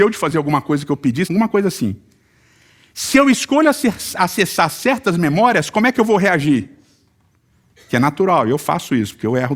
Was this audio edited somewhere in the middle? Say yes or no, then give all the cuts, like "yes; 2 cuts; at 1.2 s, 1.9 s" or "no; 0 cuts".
yes; 1 cut; at 1.2 s